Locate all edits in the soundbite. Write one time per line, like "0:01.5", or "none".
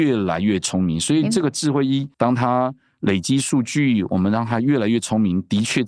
0:02.1